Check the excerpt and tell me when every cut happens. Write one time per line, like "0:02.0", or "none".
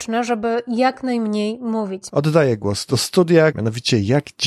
0:02.1
0:03.5

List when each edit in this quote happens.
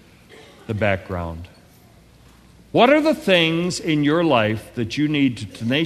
none

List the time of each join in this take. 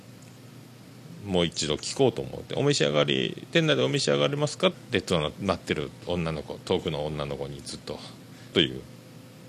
0:04.7
0:08.5

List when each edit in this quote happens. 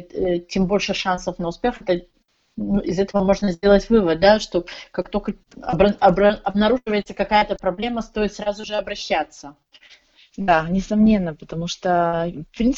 none

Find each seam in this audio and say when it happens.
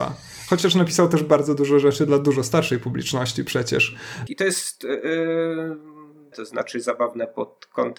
0:04.3
0:06.3

